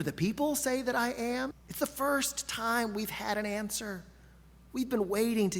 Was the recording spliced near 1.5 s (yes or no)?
yes